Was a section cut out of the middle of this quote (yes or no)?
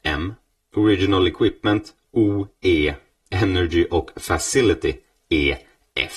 no